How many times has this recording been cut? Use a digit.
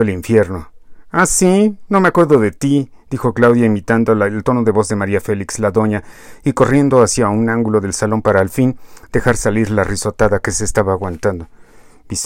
0